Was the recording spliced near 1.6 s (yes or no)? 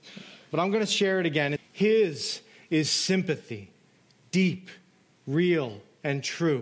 yes